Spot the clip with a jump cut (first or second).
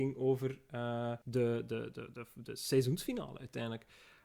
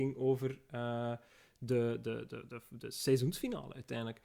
first